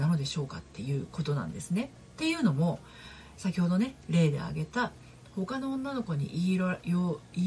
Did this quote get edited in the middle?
yes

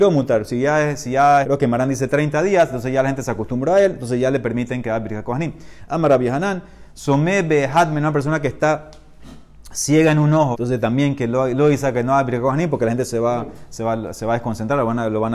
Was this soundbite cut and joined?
yes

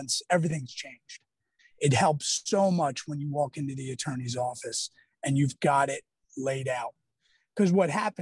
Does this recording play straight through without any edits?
no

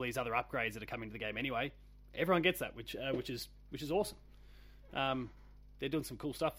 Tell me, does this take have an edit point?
no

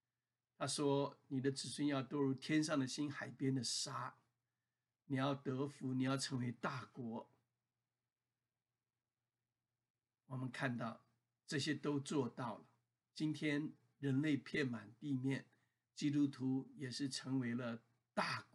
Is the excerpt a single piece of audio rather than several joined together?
yes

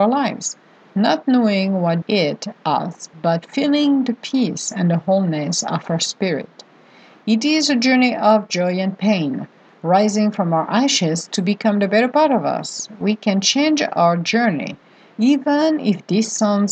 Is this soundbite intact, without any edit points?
no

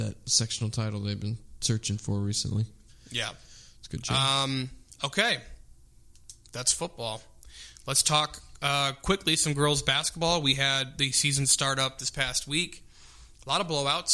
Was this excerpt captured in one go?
yes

